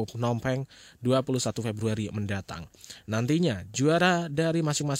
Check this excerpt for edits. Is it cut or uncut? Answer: uncut